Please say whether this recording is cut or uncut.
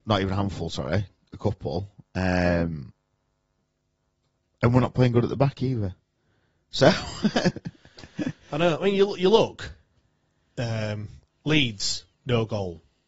uncut